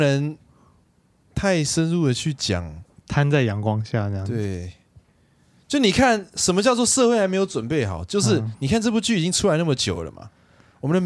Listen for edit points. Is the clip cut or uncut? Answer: uncut